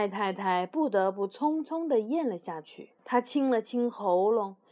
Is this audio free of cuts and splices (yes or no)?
no